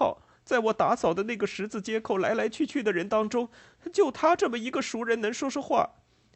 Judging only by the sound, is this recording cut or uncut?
uncut